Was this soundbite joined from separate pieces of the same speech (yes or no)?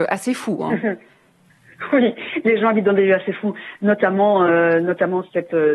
no